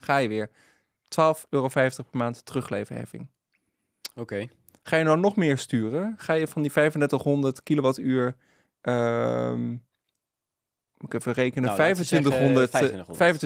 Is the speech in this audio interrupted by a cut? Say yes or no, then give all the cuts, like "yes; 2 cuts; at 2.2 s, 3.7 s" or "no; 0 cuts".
no; 0 cuts